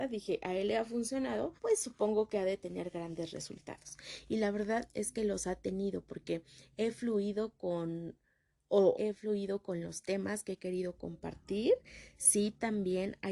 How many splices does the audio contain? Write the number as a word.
two